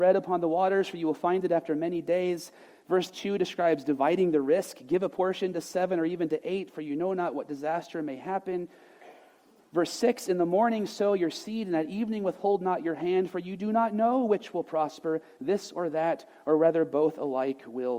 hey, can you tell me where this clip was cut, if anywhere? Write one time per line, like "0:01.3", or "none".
none